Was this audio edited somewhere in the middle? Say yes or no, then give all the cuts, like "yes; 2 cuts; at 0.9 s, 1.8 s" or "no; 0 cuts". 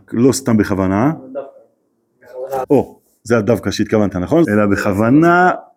yes; 2 cuts; at 2.6 s, 4.4 s